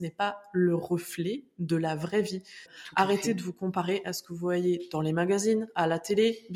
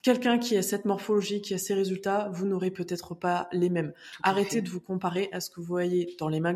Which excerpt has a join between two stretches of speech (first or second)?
first